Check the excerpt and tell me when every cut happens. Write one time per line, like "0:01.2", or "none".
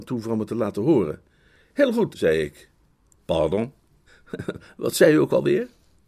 0:02.1
0:04.1